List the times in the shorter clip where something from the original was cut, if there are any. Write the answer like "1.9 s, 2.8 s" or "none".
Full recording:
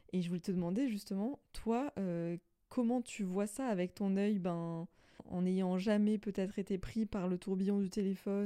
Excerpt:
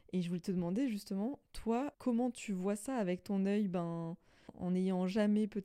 1.9 s